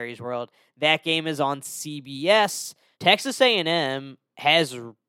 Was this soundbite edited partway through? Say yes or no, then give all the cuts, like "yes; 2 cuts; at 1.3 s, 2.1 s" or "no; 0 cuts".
yes; 1 cut; at 2.9 s